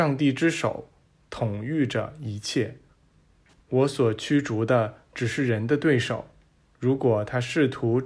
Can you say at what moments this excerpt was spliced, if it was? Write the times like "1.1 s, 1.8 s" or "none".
3.6 s, 6.6 s